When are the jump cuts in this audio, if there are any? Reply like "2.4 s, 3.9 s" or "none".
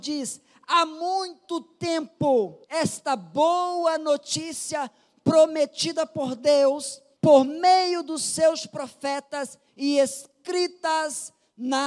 2.6 s